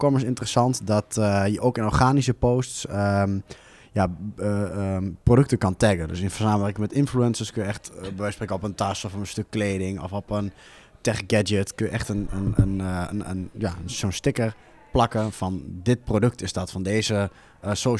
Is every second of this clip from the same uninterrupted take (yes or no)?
yes